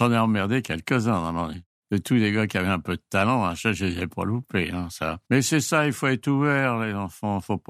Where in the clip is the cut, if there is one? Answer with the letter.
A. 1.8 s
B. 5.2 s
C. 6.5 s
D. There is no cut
B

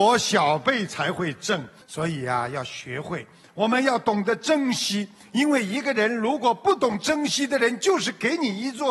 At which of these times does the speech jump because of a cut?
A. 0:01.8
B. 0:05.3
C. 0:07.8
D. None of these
A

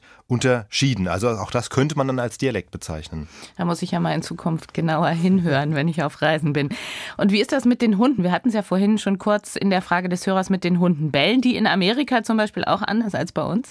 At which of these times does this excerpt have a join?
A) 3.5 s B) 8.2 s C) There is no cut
C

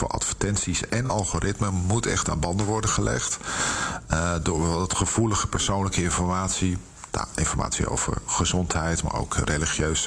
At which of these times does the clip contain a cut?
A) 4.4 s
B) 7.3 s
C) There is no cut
C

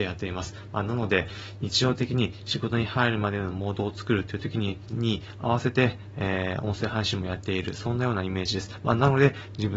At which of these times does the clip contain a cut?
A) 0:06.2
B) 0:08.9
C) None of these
C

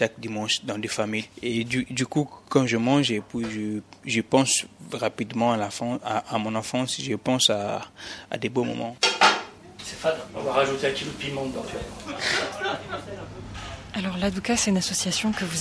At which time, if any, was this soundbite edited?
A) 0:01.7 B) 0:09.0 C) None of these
B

